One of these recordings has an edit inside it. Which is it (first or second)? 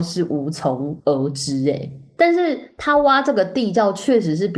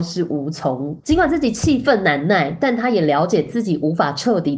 second